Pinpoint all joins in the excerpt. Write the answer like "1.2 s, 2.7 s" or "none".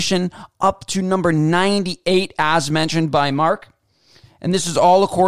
none